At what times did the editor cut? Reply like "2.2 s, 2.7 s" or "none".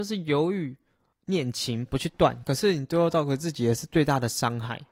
1.9 s